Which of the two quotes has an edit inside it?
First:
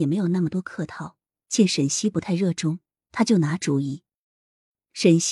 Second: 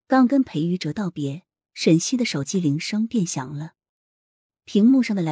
second; 1 cut; at 1.6 s

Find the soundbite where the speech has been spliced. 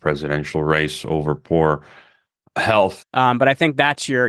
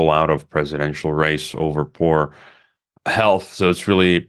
first; 1 cut; at 3.0 s

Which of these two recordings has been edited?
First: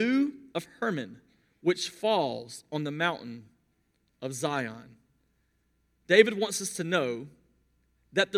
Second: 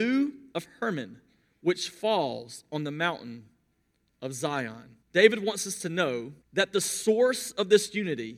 second; 2 cuts; at 5.0 s, 6.4 s

